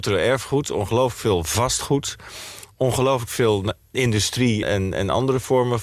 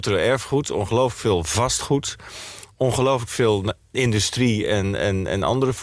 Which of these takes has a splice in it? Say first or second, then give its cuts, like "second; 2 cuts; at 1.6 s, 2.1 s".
first; 1 cut; at 4.6 s